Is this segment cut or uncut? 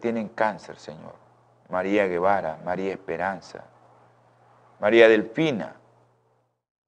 uncut